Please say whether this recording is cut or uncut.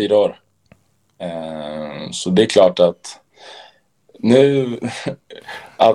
uncut